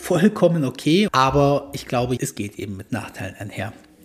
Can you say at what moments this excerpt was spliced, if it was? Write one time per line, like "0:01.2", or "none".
0:01.1
0:02.2